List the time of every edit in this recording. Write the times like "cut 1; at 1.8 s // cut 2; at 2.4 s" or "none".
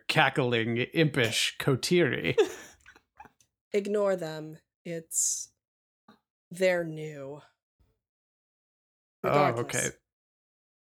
none